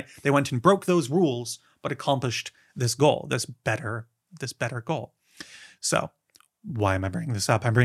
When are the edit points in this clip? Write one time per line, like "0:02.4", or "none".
none